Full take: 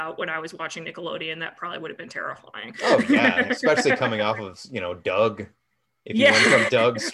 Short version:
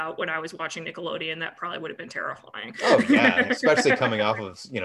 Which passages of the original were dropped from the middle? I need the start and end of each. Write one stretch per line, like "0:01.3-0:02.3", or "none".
none